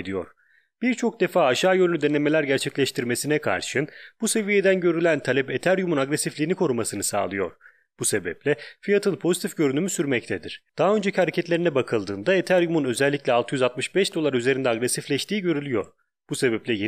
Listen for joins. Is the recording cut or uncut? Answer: uncut